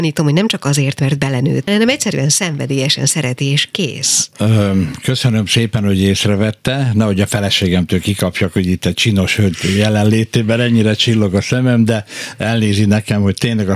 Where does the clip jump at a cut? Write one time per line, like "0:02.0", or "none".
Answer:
0:01.7